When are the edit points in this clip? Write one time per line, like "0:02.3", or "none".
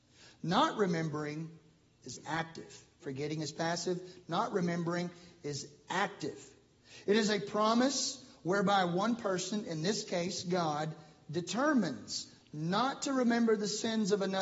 0:03.0